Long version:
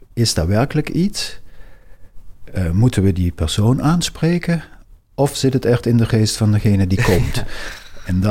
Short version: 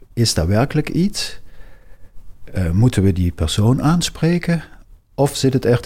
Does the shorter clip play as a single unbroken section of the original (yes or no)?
yes